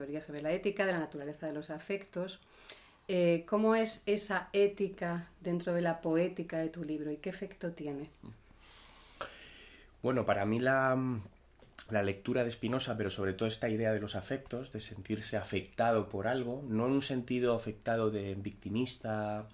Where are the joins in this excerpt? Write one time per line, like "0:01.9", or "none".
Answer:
none